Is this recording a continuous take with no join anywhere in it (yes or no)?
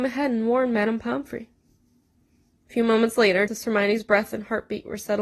no